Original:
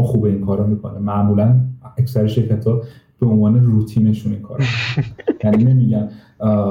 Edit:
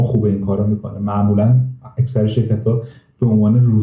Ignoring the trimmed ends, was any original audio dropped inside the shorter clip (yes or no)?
no